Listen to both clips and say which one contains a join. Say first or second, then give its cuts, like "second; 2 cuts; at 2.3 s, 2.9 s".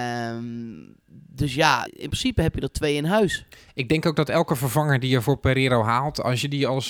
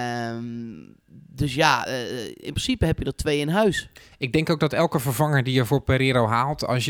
first; 1 cut; at 1.9 s